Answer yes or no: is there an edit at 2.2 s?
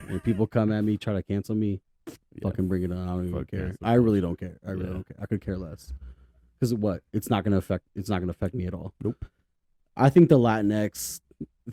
yes